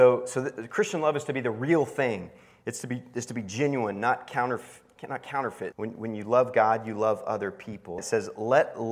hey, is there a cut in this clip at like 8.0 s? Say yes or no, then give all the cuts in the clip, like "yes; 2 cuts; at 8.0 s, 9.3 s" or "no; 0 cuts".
yes; 2 cuts; at 5.7 s, 8.0 s